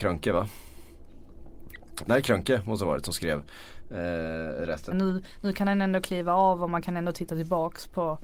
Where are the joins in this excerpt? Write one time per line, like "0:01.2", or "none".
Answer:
0:02.0
0:04.9